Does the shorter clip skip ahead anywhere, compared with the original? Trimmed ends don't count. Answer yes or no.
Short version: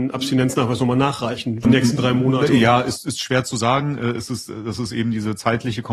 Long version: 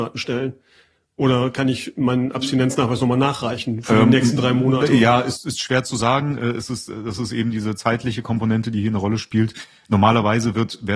yes